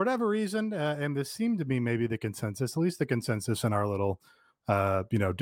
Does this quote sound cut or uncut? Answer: uncut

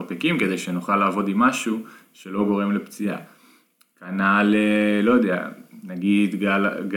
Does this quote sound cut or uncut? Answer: uncut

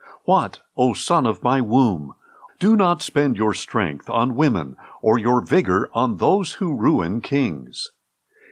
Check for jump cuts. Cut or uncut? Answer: cut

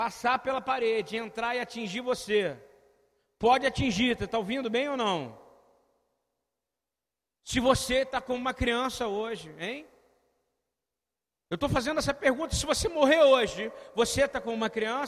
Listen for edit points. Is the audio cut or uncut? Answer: uncut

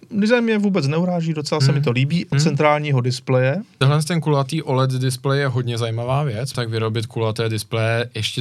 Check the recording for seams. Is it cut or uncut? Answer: cut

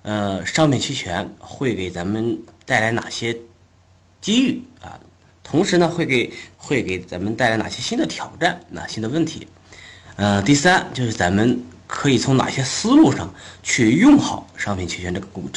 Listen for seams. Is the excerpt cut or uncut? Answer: uncut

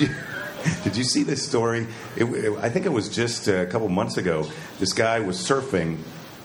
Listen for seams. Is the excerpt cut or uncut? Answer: uncut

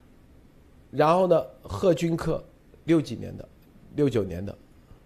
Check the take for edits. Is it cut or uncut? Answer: uncut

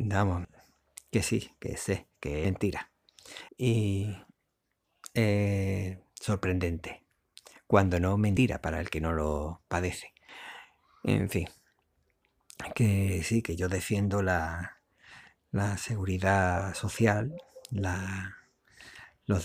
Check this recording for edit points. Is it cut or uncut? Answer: cut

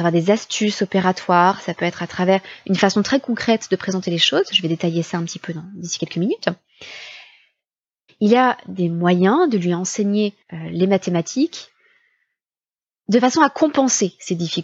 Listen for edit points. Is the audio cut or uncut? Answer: cut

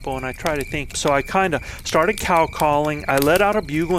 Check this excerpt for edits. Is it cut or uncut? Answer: cut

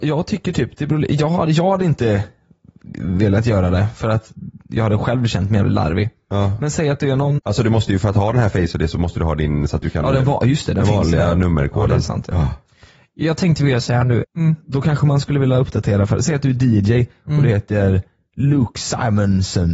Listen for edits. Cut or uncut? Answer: cut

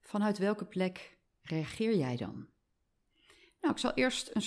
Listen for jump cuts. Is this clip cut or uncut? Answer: uncut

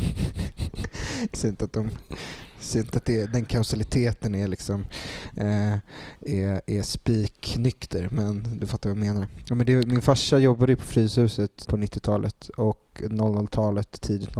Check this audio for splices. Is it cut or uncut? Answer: cut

